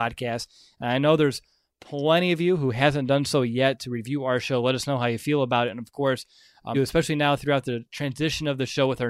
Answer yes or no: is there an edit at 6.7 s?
yes